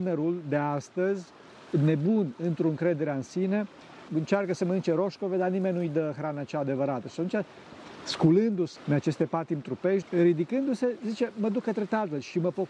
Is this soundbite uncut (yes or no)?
no